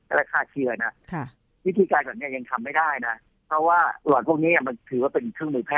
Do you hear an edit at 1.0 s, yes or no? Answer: no